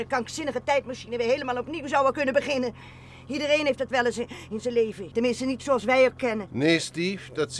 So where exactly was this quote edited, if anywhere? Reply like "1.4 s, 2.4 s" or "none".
5.1 s, 6.5 s